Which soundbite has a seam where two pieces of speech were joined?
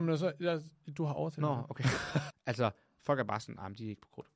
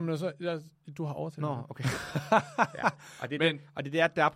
first; 1 cut; at 2.3 s

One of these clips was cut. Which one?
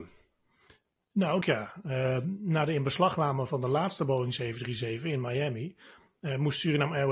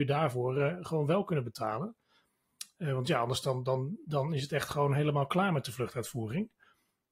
first; 1 cut; at 1.4 s

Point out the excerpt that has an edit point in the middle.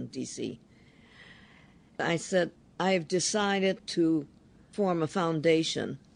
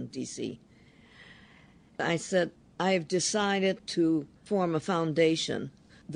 second; 1 cut; at 4.4 s

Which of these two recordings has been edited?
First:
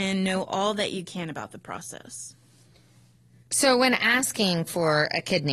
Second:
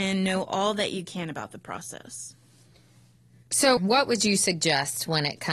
second; 1 cut; at 3.8 s

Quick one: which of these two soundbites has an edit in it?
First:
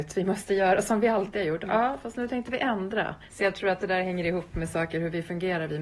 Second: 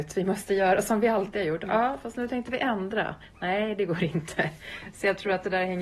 first; 1 cut; at 3.3 s

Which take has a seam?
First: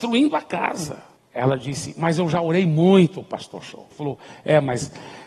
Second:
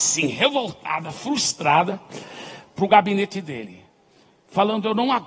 first; 2 cuts; at 1.2 s, 3.9 s

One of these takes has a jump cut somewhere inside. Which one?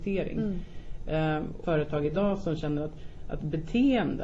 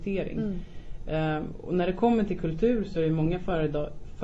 first; 1 cut; at 1.6 s

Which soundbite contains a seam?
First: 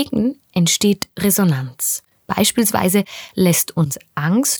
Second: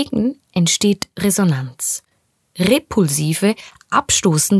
first; 1 cut; at 2.2 s

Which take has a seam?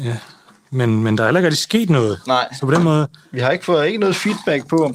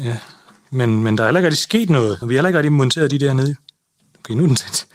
second; 1 cut; at 2.2 s

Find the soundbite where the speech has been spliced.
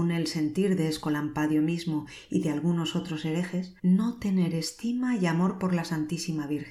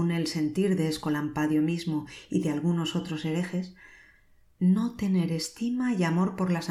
first; 1 cut; at 3.8 s

